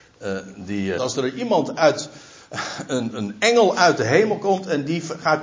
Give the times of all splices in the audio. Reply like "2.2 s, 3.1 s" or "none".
1.0 s, 3.1 s